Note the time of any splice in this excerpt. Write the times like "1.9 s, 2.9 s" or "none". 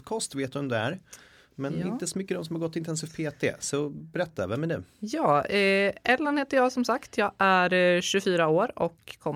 none